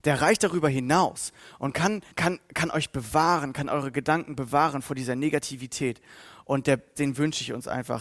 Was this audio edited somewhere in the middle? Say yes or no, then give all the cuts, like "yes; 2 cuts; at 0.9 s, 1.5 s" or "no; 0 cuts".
yes; 2 cuts; at 2.1 s, 6.9 s